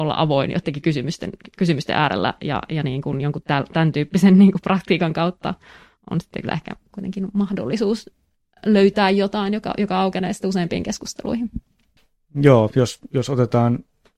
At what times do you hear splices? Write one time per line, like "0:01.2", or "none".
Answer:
none

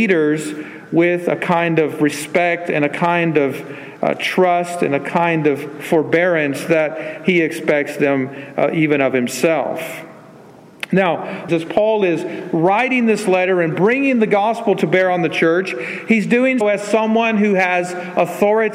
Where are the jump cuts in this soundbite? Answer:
0:11.5
0:16.6

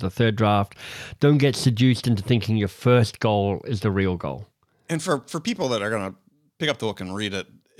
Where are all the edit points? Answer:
none

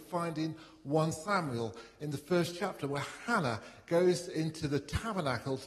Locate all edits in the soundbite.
none

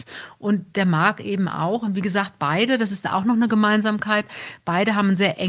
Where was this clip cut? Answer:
none

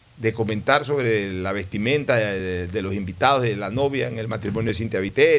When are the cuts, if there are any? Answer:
none

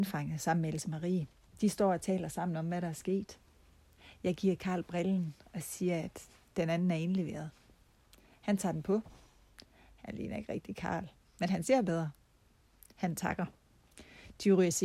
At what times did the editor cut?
none

